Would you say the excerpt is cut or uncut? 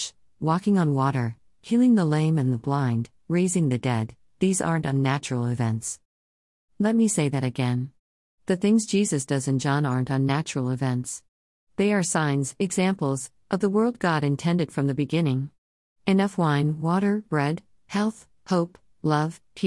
uncut